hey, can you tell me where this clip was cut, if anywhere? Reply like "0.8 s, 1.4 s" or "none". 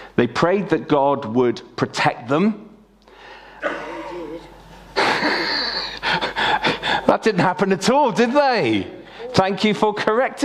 3.6 s